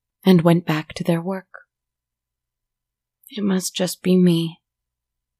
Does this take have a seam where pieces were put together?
no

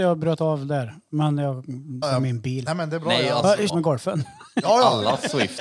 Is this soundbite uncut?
no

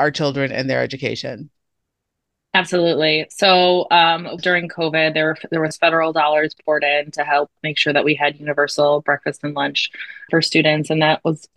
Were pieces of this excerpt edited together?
yes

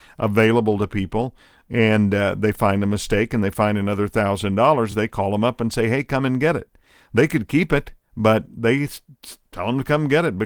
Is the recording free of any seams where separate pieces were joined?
yes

